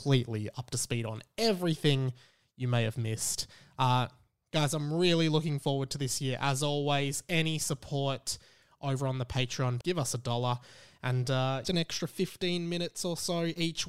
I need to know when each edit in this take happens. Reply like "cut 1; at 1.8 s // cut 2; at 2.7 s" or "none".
cut 1; at 9.8 s // cut 2; at 11.6 s